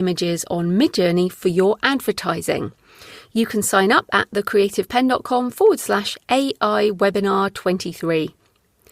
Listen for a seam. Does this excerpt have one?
no; 0 cuts

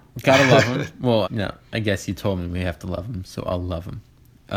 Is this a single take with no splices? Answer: no; 1 cut; at 1.2 s

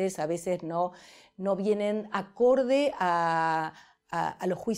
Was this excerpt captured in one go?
yes; 0 cuts

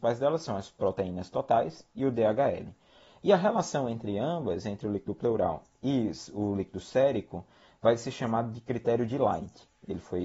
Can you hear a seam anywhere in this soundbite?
no; 0 cuts

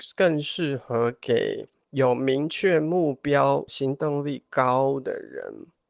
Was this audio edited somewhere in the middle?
yes; 1 cut; at 3.7 s

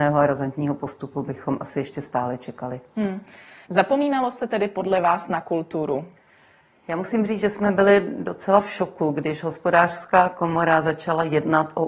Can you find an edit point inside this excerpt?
yes; 1 cut; at 3.6 s

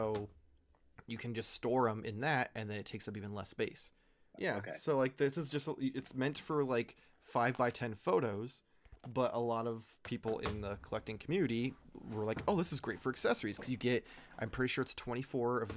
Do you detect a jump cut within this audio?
yes; 1 cut; at 4.3 s

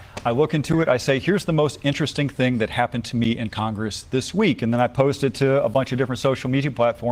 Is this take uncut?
yes; 0 cuts

